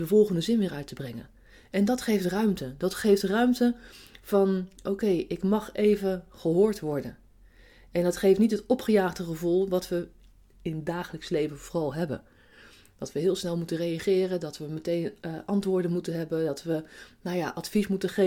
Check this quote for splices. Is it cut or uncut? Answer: uncut